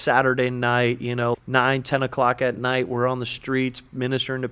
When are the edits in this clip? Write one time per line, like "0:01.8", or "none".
0:01.3